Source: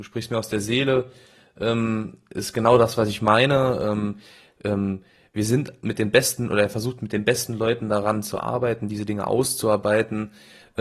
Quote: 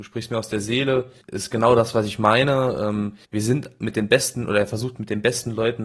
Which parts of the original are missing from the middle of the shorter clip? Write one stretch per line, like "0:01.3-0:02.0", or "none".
0:01.2-0:02.2
0:04.3-0:05.3